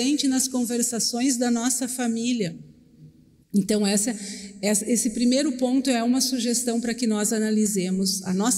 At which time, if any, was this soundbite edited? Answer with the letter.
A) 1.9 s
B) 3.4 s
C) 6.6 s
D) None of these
B